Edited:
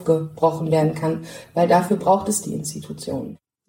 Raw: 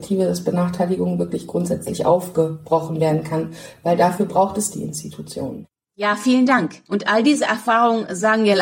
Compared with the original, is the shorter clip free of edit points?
yes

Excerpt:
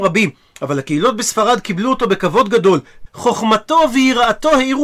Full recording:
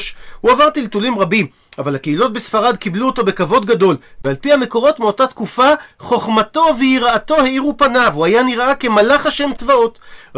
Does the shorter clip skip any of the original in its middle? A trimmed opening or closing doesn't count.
yes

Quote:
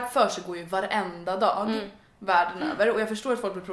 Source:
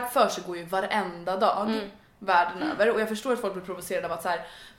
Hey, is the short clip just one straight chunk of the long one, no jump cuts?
yes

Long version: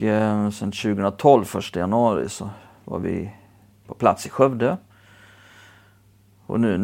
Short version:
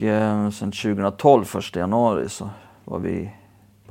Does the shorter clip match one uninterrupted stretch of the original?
yes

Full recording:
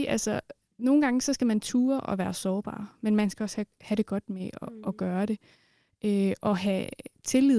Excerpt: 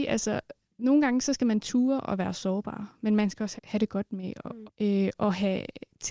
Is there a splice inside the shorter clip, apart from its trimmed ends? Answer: yes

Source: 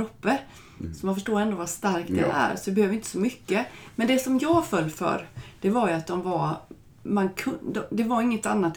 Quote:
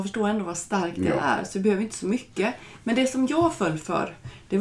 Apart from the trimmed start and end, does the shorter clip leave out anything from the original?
no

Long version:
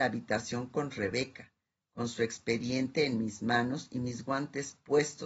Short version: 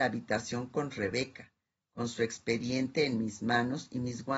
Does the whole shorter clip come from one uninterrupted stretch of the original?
yes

